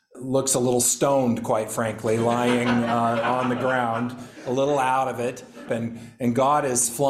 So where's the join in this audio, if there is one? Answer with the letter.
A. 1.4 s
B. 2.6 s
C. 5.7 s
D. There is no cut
C